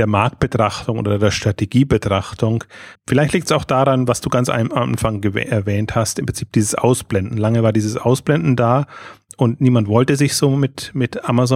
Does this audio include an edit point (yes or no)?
yes